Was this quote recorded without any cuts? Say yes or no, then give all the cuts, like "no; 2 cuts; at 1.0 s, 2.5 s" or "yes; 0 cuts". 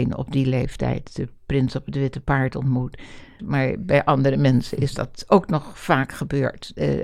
no; 1 cut; at 3.4 s